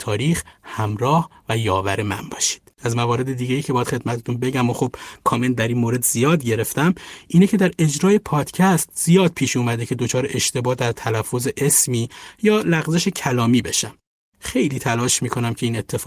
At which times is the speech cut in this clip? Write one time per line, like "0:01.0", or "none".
0:02.7